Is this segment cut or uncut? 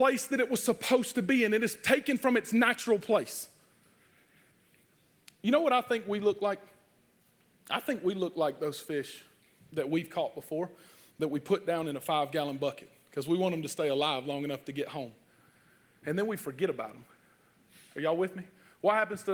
uncut